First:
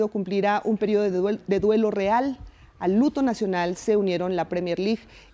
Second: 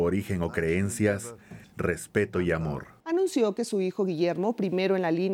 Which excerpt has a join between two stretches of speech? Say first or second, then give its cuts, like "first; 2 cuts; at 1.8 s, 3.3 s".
second; 2 cuts; at 1.6 s, 3.0 s